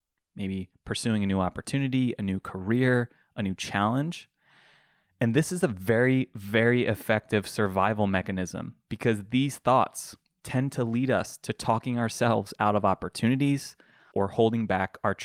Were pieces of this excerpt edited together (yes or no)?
yes